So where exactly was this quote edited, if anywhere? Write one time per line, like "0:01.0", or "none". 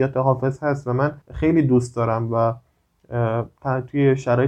0:01.2

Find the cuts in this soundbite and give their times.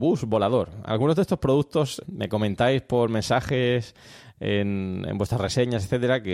0:02.0

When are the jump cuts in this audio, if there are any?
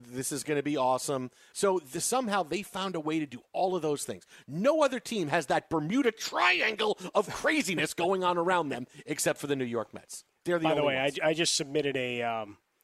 0:01.5

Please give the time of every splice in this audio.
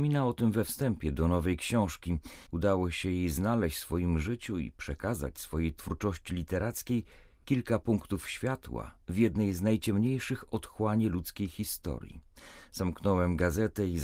0:02.5

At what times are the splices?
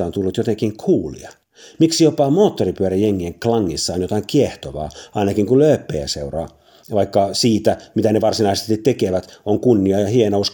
none

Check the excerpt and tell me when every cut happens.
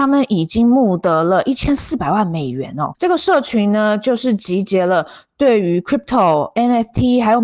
0:02.9

